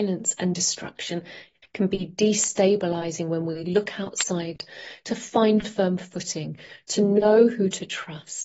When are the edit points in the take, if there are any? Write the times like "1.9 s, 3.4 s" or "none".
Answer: 1.6 s

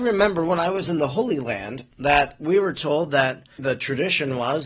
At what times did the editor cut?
3.6 s

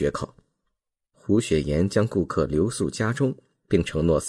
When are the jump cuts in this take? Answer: 1.1 s

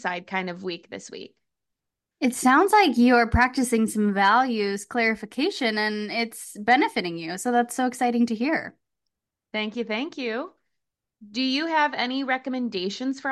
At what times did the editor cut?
none

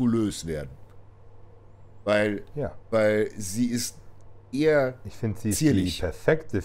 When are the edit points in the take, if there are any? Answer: none

